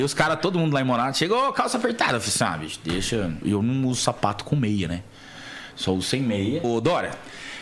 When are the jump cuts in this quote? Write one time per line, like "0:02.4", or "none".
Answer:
0:03.4
0:06.6